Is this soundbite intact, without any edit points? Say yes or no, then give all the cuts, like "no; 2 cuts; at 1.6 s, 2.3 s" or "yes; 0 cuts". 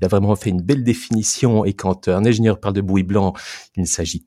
yes; 0 cuts